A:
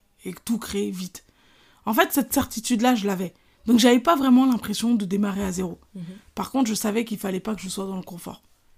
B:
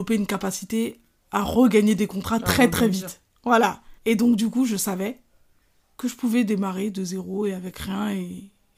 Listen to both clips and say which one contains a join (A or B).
B